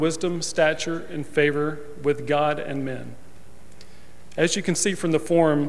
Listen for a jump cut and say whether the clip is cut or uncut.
uncut